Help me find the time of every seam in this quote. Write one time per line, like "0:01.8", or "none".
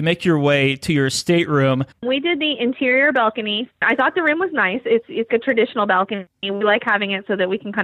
0:01.9
0:03.7
0:05.3